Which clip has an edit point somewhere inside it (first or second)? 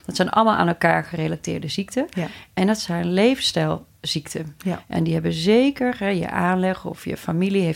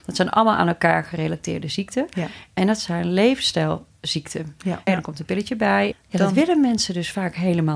second